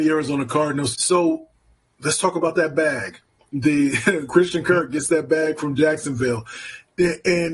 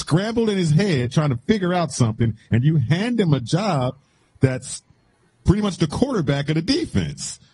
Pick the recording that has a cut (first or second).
first